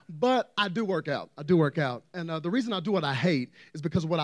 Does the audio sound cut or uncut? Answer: uncut